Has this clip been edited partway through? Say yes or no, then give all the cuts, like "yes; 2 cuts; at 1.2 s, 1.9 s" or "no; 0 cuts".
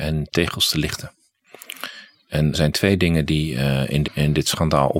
yes; 2 cuts; at 2.5 s, 4.0 s